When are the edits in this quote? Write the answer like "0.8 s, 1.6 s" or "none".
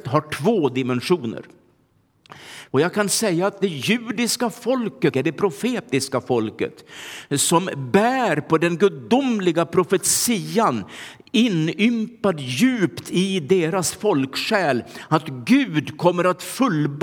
2.7 s, 5.1 s